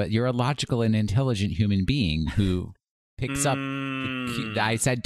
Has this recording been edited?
no; 0 cuts

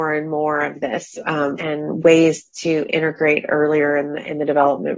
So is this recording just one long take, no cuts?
no; 1 cut; at 1.6 s

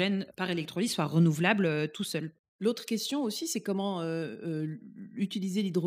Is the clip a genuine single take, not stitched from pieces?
yes; 0 cuts

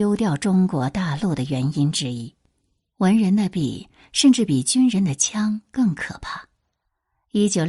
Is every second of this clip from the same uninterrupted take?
yes; 0 cuts

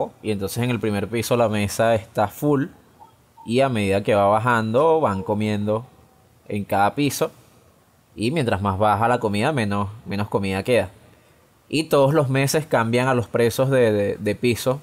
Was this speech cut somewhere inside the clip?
no; 0 cuts

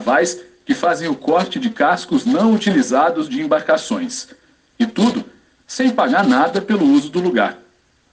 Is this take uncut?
yes; 0 cuts

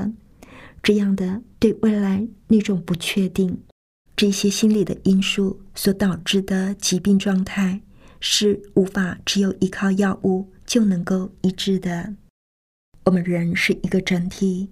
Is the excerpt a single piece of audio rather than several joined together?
no; 1 cut; at 4.1 s

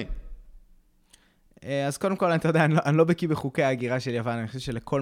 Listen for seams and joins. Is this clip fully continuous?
yes; 0 cuts

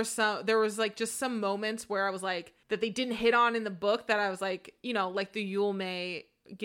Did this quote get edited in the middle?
yes; 1 cut; at 2.6 s

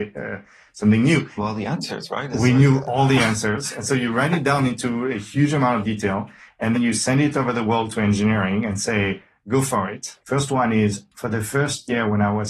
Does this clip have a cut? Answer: yes; 3 cuts; at 1.4 s, 6.7 s, 10.2 s

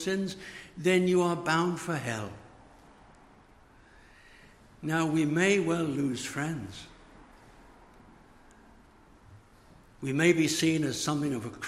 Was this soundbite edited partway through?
no; 0 cuts

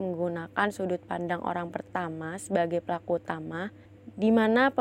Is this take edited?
no; 0 cuts

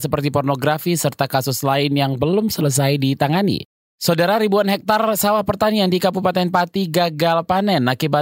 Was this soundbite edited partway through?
yes; 1 cut; at 3.8 s

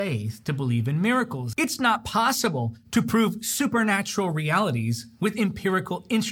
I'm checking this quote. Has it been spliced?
yes; 1 cut; at 1.5 s

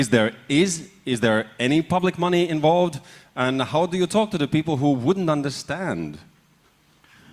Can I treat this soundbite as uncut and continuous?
yes; 0 cuts

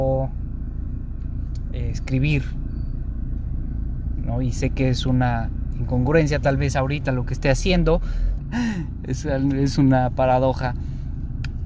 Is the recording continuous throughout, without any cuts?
no; 1 cut; at 8.4 s

